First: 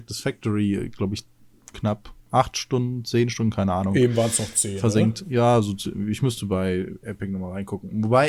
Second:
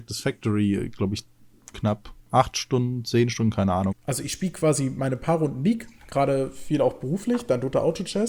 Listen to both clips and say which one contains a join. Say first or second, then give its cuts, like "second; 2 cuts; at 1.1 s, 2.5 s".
second; 1 cut; at 3.9 s